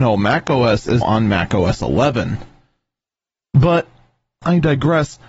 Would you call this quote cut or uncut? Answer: cut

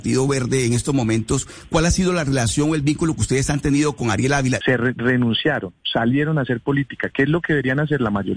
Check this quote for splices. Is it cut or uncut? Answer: cut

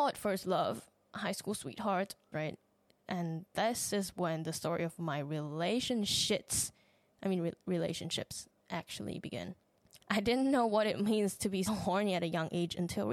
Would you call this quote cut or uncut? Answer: cut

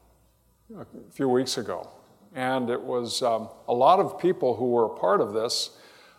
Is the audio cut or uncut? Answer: uncut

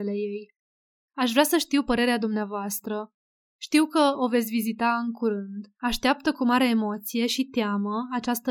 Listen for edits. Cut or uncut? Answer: cut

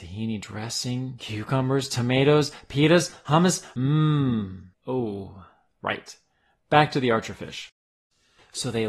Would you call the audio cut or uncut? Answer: uncut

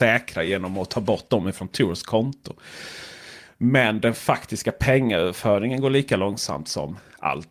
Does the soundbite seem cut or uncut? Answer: uncut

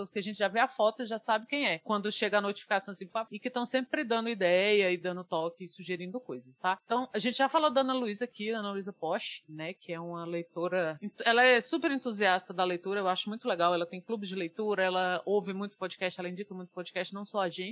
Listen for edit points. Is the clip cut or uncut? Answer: cut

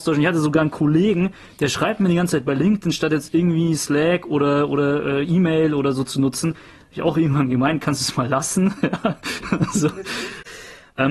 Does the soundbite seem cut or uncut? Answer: uncut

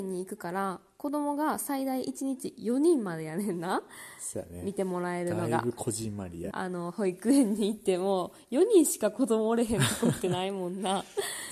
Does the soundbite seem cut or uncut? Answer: cut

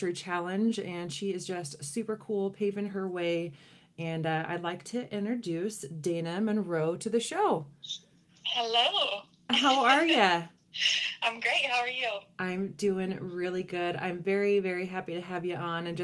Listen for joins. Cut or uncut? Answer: uncut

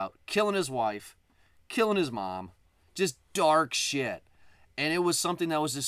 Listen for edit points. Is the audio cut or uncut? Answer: uncut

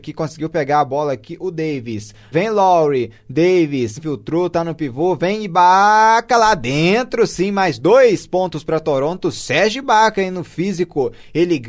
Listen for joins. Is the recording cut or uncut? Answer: cut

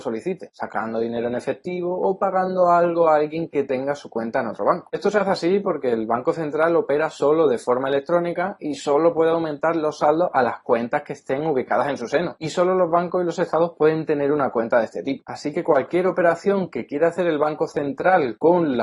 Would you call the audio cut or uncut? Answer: uncut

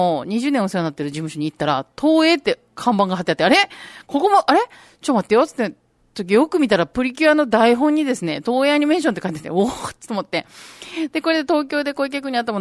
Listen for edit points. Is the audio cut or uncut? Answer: uncut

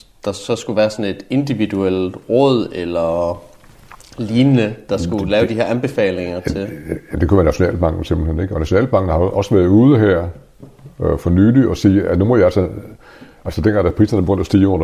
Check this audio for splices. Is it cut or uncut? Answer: uncut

